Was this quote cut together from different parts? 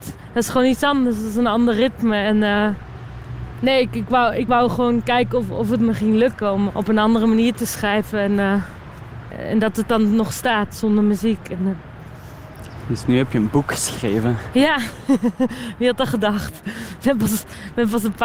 yes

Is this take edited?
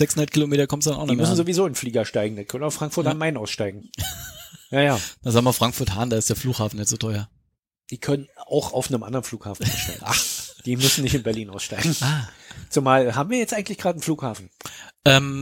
no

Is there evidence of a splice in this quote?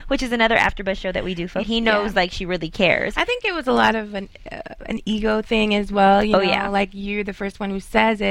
yes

